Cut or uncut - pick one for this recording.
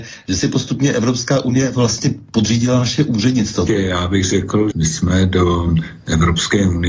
cut